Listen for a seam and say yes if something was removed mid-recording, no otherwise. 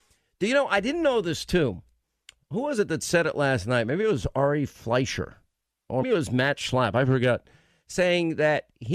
yes